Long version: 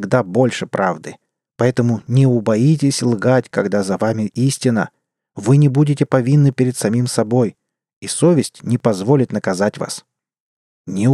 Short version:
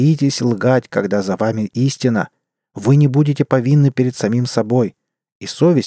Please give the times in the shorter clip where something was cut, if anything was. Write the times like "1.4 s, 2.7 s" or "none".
none